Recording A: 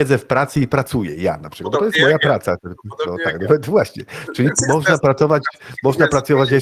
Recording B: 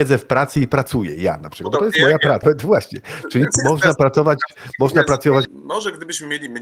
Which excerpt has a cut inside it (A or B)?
B